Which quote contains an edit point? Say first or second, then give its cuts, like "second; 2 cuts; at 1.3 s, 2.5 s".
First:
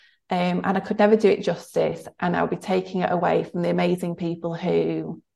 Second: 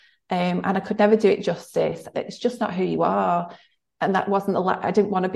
second; 1 cut; at 2.1 s